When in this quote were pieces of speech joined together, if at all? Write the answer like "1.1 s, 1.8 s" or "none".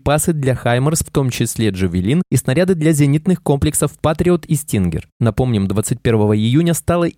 1.0 s